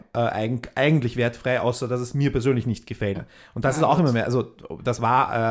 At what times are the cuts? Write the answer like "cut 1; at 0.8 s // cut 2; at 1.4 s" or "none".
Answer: cut 1; at 3.1 s